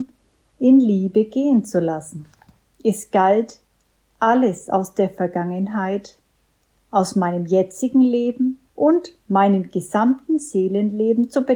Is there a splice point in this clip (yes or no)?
yes